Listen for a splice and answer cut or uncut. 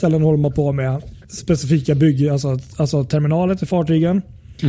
cut